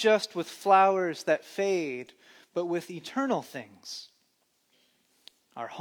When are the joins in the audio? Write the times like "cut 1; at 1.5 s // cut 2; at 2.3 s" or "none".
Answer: none